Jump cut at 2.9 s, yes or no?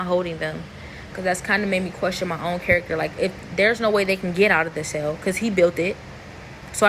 no